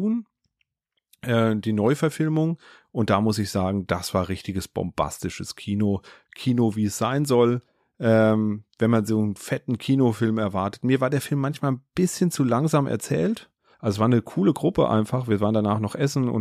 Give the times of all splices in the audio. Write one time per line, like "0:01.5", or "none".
0:13.7